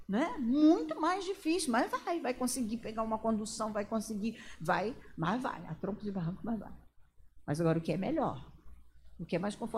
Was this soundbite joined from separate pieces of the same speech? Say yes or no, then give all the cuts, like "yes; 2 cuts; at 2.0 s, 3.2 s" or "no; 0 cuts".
no; 0 cuts